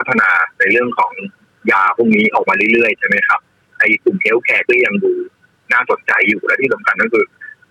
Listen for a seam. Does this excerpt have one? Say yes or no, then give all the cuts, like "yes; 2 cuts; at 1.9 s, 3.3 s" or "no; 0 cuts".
no; 0 cuts